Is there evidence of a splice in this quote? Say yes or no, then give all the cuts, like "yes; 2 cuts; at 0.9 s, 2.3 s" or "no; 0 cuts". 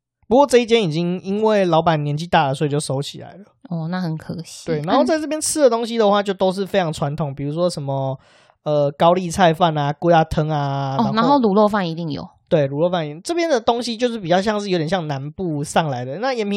no; 0 cuts